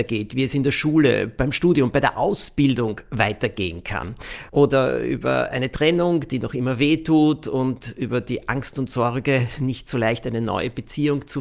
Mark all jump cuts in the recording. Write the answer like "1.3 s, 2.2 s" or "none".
4.5 s